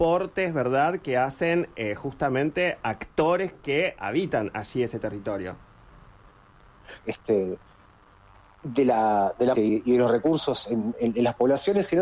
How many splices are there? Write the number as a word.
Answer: two